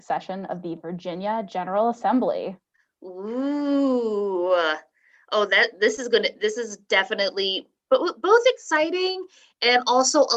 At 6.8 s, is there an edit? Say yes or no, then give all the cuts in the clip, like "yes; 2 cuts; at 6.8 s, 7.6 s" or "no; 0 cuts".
no; 0 cuts